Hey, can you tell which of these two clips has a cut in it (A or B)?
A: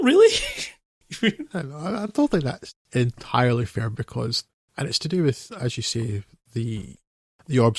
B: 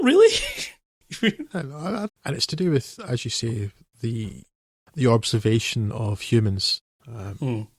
B